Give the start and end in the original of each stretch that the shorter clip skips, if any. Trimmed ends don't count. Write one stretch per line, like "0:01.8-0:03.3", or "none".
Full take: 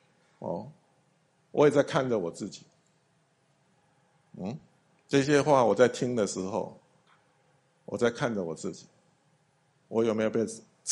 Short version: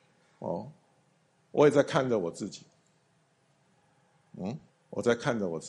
0:04.7-0:07.6